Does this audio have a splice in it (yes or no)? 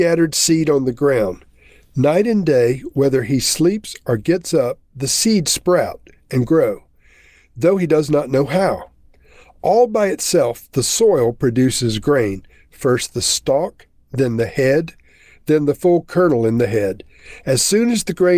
no